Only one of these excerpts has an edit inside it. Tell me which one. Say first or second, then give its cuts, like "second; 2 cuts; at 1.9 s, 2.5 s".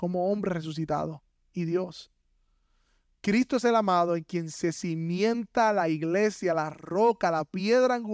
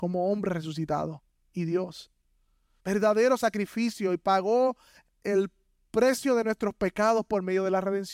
second; 1 cut; at 2.8 s